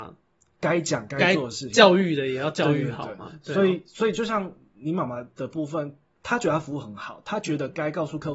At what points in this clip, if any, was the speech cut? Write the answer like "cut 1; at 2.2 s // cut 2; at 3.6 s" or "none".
none